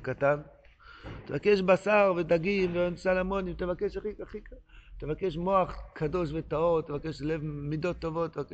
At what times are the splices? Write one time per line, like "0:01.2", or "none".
none